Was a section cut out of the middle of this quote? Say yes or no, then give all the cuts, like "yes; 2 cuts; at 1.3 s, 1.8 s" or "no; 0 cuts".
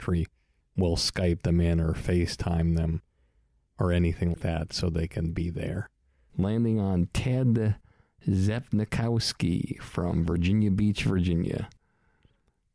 yes; 2 cuts; at 4.3 s, 6.3 s